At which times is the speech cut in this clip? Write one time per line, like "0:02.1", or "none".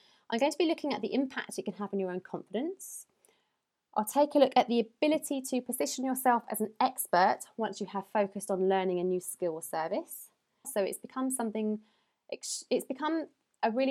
0:10.6